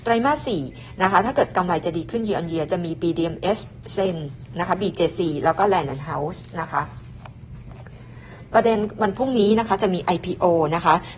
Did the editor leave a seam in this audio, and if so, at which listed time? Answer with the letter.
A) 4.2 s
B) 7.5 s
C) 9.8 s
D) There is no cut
D